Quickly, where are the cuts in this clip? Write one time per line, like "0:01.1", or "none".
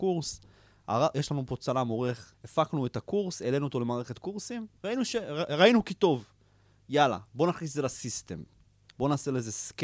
0:02.3
0:04.8